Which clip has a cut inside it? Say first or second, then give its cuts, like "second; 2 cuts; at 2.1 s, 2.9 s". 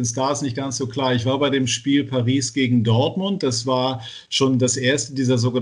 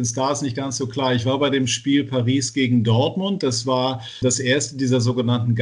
second; 1 cut; at 4.2 s